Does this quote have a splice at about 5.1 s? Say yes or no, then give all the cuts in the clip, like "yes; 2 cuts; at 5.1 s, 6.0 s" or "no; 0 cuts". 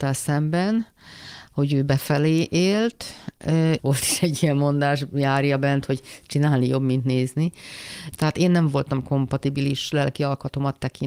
no; 2 cuts; at 3.8 s, 8.1 s